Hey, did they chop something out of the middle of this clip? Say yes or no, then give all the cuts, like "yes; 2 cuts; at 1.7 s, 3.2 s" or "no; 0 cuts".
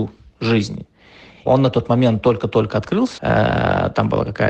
yes; 2 cuts; at 1.5 s, 3.2 s